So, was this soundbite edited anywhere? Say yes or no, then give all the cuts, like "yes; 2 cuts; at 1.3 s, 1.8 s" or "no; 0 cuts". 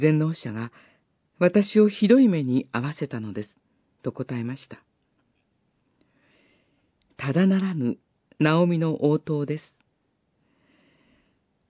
no; 0 cuts